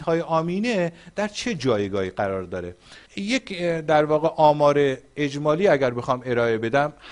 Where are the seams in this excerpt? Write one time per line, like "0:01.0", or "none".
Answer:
0:03.1